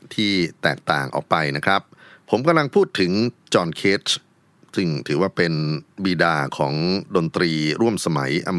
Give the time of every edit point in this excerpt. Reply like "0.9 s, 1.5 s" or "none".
none